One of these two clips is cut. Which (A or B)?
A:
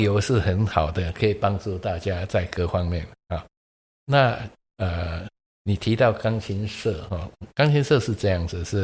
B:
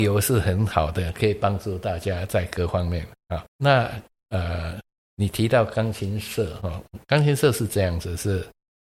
B